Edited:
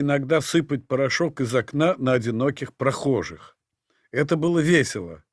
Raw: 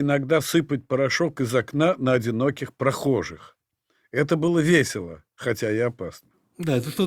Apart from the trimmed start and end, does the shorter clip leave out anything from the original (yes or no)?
no